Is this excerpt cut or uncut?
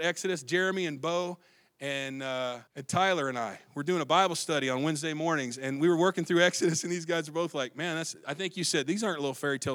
cut